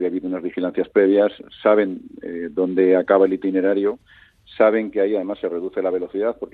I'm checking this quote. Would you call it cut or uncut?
uncut